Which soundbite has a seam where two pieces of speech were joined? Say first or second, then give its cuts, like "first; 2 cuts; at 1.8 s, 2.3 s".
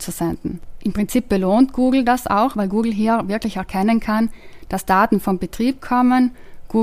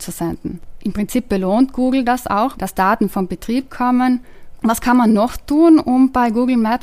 second; 2 cuts; at 2.5 s, 4.6 s